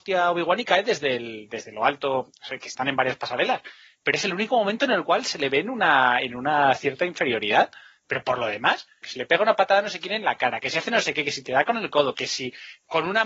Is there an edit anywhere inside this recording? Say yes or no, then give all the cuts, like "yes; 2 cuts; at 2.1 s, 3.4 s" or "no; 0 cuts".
yes; 2 cuts; at 9.0 s, 12.1 s